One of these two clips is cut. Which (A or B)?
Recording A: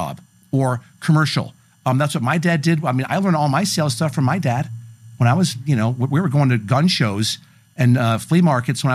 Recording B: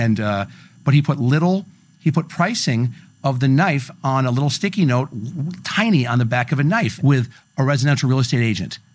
B